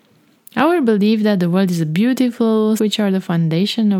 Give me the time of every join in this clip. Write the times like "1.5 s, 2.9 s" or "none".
2.8 s